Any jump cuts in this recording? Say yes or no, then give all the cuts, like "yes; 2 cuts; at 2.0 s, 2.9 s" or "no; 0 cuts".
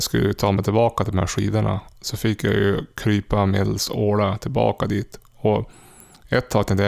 no; 0 cuts